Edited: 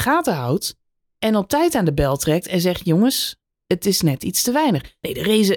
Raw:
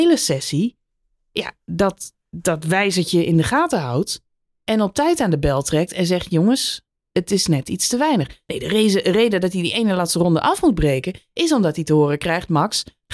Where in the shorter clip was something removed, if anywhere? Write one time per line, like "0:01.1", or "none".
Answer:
none